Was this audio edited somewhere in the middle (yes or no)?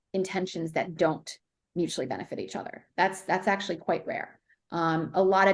no